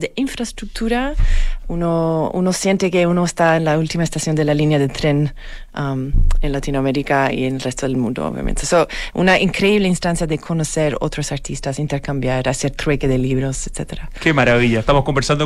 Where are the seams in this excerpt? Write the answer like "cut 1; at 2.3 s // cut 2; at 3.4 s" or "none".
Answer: none